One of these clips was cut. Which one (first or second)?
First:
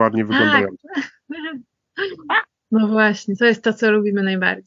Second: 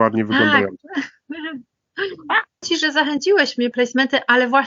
second